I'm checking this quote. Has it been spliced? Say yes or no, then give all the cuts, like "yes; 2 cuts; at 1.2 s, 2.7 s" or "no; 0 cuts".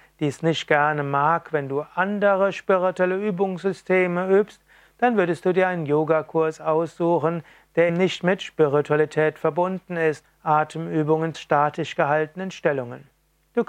yes; 3 cuts; at 7.9 s, 10.2 s, 11.3 s